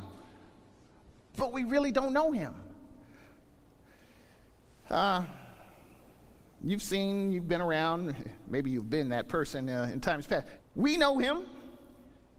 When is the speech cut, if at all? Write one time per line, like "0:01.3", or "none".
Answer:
0:10.6